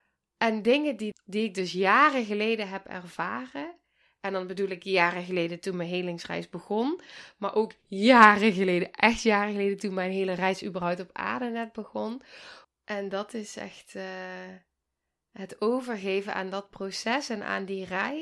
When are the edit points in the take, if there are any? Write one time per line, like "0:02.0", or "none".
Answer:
0:01.1
0:12.6